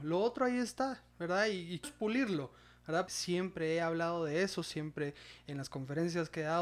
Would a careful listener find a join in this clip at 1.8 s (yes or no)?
yes